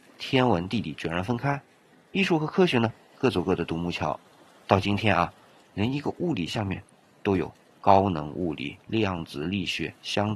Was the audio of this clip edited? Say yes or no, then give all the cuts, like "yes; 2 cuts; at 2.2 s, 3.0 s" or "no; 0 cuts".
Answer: no; 0 cuts